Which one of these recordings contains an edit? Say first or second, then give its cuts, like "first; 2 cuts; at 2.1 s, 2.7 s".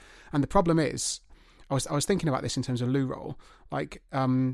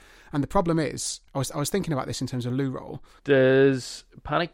second; 2 cuts; at 1.3 s, 3.2 s